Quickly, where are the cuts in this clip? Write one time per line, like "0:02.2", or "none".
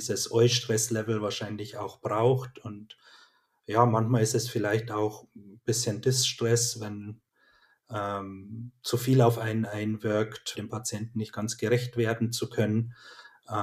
0:10.5